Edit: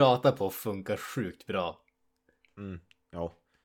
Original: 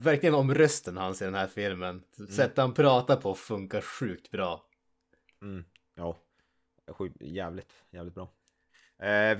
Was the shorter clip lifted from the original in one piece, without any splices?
yes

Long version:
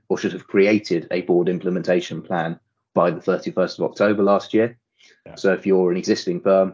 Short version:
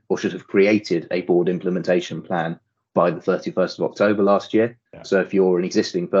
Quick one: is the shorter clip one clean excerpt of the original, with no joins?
no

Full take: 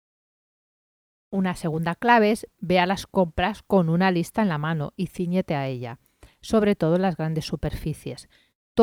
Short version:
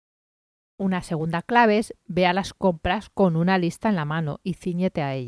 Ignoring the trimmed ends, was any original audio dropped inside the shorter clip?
no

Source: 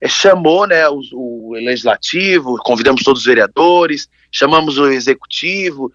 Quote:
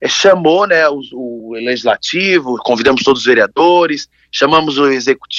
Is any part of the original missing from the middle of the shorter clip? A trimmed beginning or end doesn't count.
no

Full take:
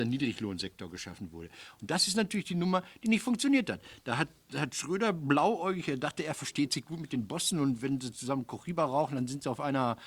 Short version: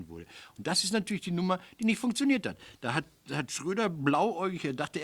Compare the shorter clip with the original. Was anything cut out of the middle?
no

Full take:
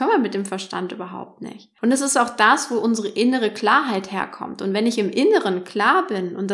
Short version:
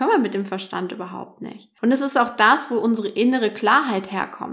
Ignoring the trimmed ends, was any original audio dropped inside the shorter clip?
no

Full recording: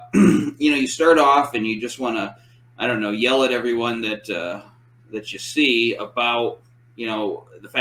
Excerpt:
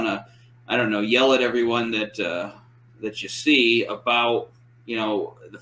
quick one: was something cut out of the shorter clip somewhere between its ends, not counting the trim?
no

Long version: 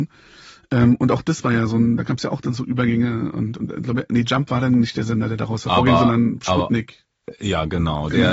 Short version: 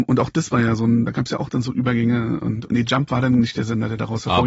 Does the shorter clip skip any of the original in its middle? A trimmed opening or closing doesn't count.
yes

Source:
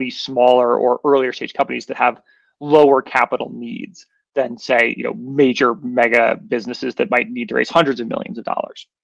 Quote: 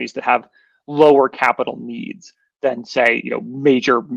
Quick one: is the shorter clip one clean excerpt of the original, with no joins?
yes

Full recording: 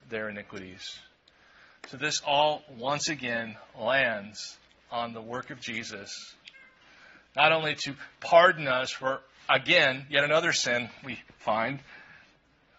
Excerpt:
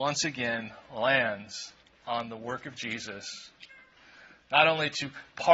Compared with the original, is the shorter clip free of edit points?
yes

